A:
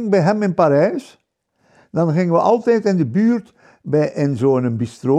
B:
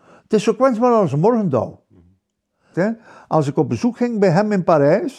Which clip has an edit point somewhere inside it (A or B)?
B